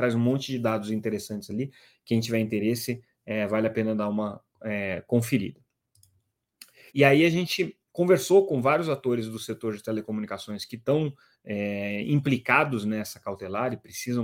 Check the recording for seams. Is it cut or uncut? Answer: cut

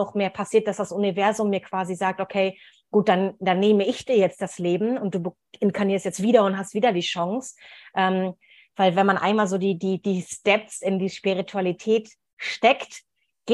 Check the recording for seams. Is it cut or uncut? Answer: uncut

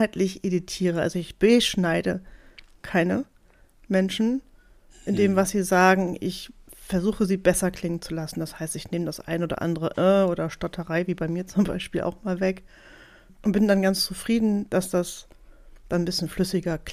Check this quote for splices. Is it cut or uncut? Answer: uncut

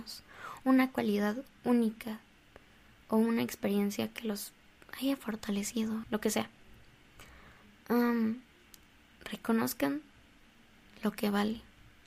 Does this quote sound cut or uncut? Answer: cut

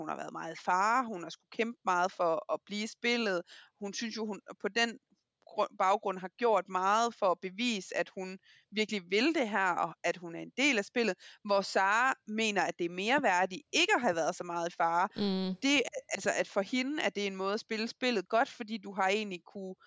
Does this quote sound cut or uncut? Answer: uncut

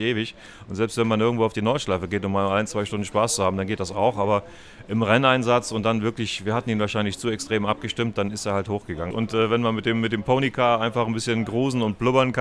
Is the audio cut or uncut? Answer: cut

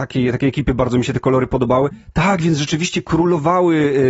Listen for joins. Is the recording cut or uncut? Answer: uncut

